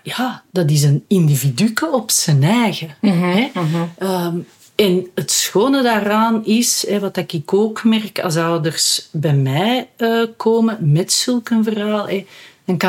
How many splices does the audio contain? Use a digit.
0